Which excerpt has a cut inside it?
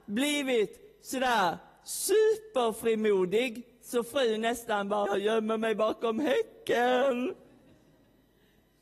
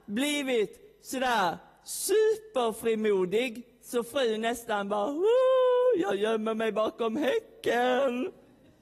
first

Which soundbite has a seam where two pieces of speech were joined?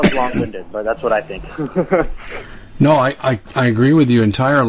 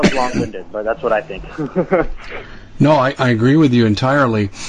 second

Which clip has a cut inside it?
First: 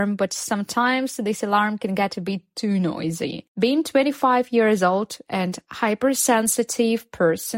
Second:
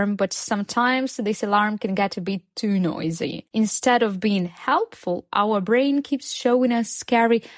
first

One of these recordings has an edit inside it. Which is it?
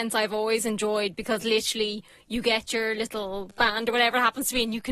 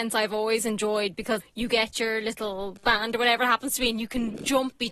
second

